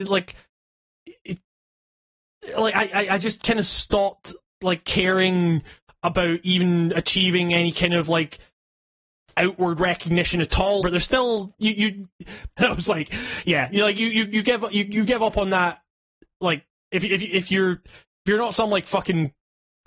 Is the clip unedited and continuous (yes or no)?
no